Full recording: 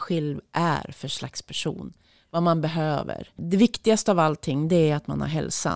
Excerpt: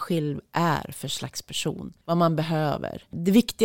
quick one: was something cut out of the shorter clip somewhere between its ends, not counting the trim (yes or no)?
yes